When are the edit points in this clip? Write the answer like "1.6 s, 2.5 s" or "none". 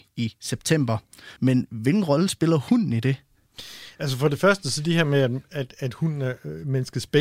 1.4 s